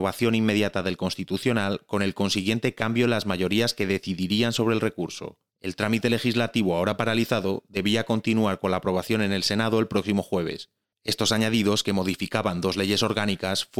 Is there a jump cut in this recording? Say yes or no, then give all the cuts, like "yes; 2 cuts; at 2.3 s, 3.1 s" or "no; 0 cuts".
no; 0 cuts